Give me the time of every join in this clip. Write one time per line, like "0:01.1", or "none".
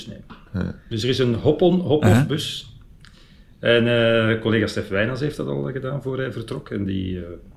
none